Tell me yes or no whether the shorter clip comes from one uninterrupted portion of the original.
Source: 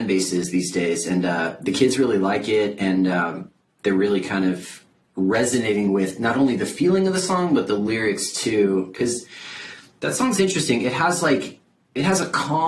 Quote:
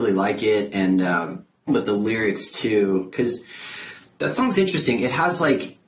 no